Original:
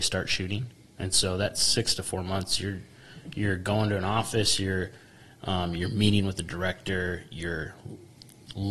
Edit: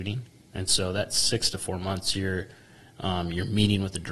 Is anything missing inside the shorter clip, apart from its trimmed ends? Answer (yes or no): yes